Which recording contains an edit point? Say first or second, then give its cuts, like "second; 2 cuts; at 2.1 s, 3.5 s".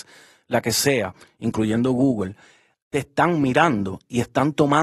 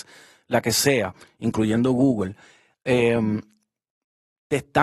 first; 1 cut; at 2.8 s